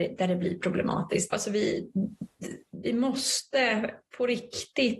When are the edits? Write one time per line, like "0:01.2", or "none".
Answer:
0:01.3

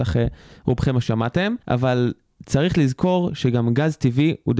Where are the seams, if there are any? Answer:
0:01.6

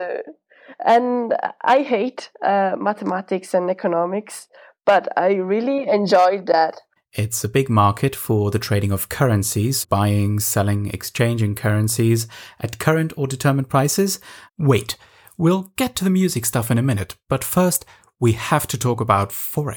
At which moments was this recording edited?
0:07.0
0:09.8
0:14.5

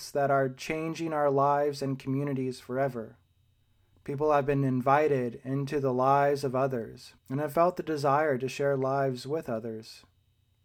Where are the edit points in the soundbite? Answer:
0:03.9
0:07.2

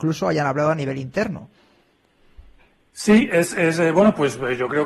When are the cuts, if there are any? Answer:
none

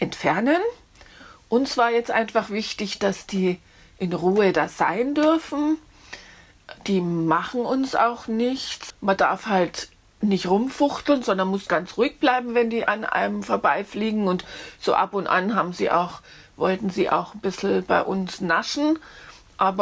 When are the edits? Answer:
0:08.9

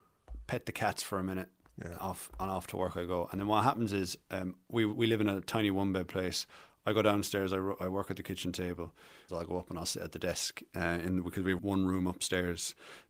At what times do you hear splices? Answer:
0:09.3
0:11.6

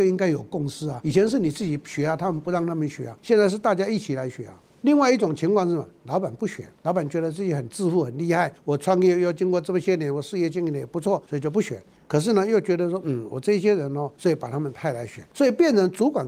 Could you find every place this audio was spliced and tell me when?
0:14.2

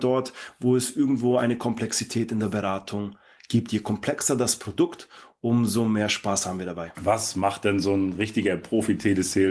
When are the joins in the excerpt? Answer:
0:06.9

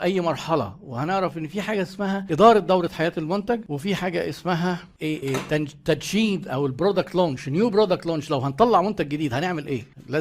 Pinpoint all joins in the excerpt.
0:05.2

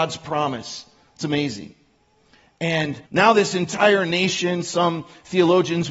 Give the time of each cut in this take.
0:03.1

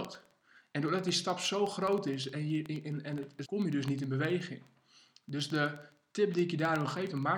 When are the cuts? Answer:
0:03.4

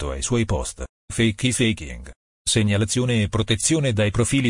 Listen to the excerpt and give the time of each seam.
0:00.9

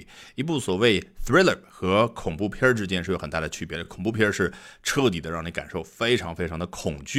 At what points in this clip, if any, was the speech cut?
none

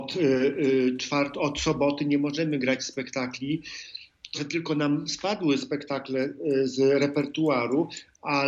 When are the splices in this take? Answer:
0:01.3
0:04.3

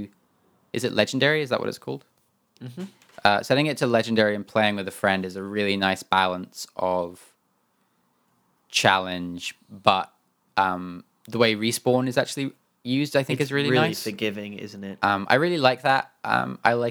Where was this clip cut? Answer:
none

